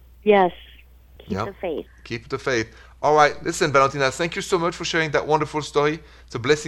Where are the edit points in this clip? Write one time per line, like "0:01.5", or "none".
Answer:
none